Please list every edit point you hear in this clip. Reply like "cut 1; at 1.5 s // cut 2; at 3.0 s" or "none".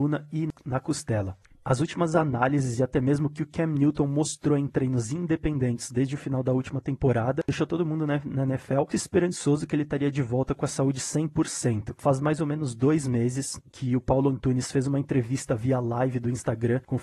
cut 1; at 8.9 s